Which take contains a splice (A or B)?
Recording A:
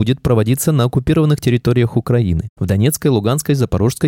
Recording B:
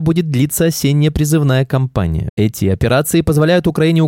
B